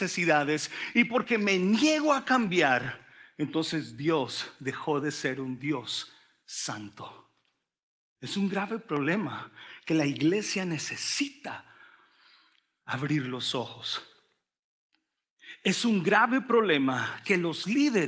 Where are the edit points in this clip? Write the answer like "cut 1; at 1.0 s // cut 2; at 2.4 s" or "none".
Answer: none